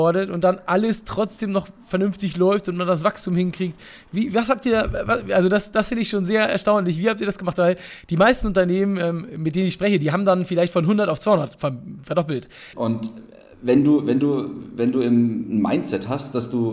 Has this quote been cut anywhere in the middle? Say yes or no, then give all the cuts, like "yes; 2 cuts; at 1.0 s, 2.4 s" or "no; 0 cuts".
yes; 1 cut; at 12.7 s